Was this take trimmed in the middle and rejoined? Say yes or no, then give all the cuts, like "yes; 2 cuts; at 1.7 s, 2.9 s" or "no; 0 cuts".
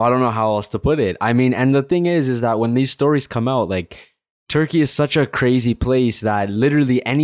no; 0 cuts